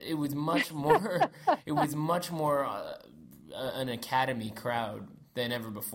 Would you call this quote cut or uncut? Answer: uncut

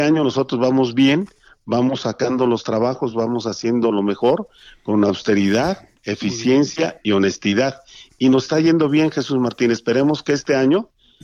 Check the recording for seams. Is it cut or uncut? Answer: uncut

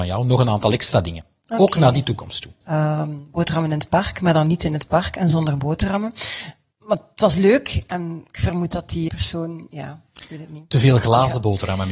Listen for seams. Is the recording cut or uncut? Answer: cut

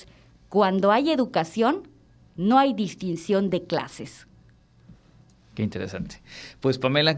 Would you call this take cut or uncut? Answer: uncut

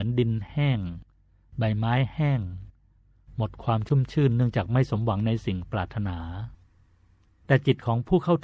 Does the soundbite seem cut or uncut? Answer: uncut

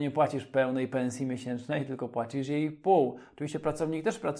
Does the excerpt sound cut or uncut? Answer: uncut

